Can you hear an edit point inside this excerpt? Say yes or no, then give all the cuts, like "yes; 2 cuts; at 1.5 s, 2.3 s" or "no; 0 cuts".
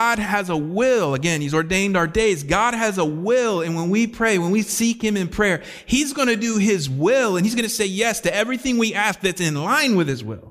no; 0 cuts